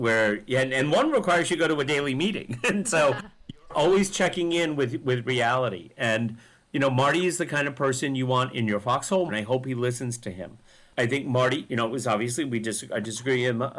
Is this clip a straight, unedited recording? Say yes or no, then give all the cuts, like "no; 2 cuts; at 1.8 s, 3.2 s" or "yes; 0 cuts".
no; 1 cut; at 9.3 s